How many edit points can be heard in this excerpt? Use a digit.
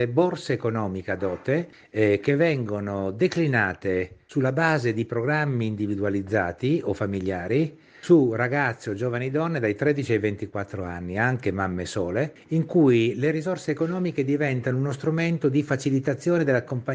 0